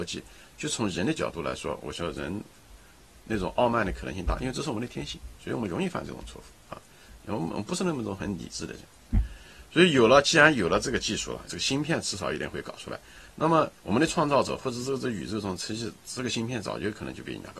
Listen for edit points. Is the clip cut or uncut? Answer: cut